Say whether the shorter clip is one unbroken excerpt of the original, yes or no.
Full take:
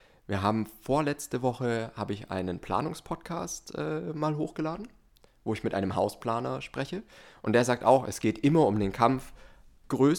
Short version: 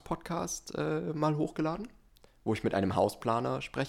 yes